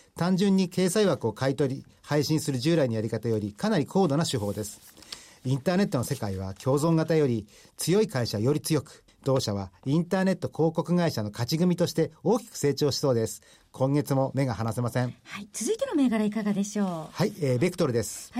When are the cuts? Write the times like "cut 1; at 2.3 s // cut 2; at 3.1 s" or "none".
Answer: cut 1; at 9.1 s